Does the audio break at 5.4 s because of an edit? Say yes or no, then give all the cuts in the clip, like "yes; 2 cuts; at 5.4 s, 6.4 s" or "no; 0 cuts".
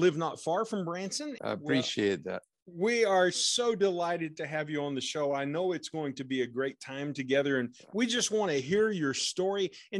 no; 1 cut; at 1.4 s